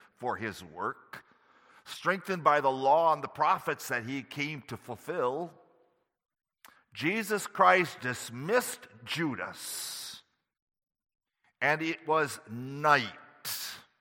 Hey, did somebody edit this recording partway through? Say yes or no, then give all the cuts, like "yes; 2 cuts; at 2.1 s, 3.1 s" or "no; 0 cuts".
yes; 2 cuts; at 6.7 s, 8.0 s